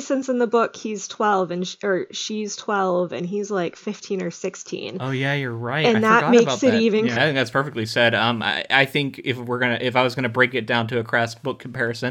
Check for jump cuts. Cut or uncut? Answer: cut